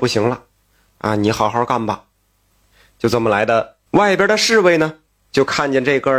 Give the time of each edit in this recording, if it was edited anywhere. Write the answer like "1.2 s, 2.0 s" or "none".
3.9 s